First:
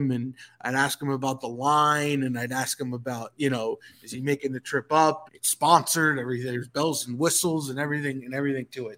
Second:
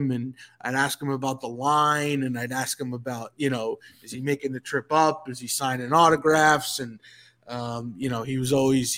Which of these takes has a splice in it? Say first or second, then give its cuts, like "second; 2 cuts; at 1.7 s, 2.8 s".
first; 1 cut; at 5.3 s